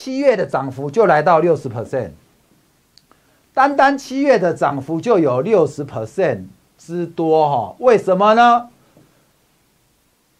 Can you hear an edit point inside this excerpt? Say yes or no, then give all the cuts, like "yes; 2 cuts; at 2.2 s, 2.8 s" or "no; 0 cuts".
no; 0 cuts